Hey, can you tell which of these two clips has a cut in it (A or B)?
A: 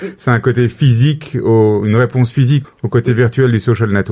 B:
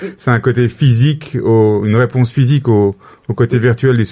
A